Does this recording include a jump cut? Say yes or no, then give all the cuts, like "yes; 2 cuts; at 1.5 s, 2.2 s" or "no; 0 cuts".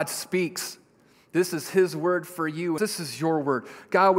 yes; 1 cut; at 2.8 s